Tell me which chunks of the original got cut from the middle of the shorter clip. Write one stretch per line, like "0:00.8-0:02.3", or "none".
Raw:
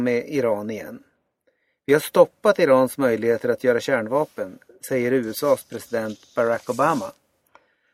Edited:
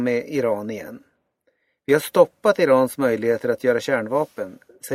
none